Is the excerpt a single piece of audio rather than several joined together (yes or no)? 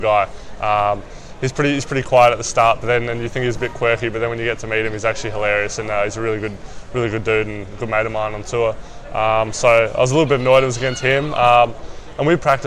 yes